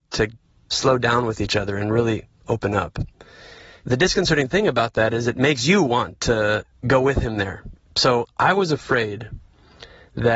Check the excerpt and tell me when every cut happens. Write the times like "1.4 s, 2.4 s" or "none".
none